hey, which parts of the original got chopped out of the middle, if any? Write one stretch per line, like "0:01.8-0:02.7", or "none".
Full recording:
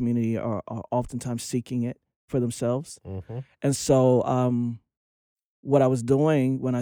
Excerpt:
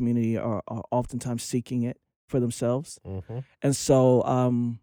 none